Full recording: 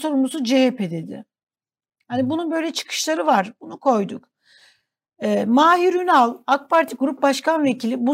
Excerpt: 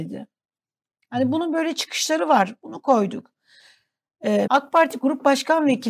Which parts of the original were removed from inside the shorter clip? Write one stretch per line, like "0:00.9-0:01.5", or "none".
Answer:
0:05.4-0:06.4